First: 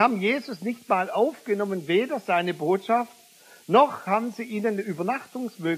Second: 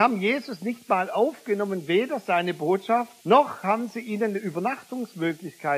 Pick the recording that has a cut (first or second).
second